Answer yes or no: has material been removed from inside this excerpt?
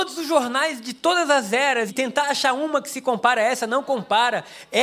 yes